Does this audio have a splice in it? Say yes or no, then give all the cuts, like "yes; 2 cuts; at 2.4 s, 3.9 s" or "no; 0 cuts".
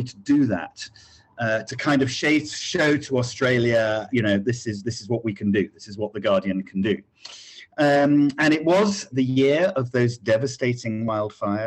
yes; 2 cuts; at 4.1 s, 9.1 s